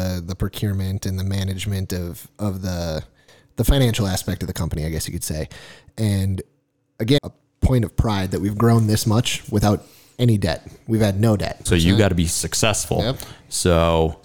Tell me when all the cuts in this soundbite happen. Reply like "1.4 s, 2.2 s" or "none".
7.2 s, 11.7 s